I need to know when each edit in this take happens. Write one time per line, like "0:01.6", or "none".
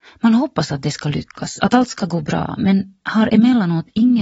none